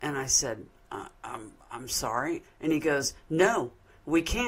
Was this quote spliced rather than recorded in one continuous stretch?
yes; 1 cut; at 2.4 s

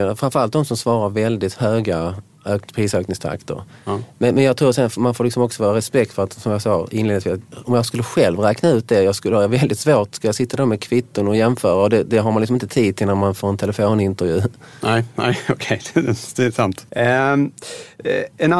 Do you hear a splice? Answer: yes; 1 cut; at 16.9 s

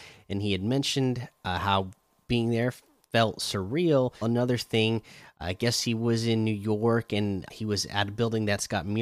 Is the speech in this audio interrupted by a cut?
yes; 2 cuts; at 4.2 s, 7.5 s

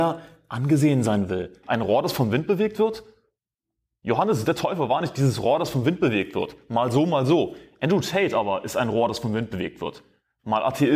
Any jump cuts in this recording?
yes; 1 cut; at 1.6 s

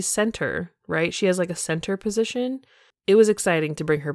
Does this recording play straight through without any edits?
yes; 0 cuts

